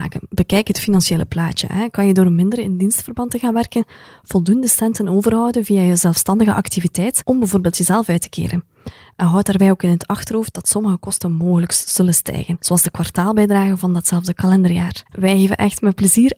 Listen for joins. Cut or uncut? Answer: cut